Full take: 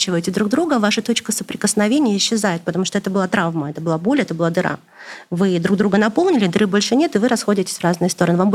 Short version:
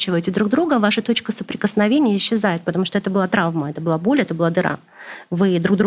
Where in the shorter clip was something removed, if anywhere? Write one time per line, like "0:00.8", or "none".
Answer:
none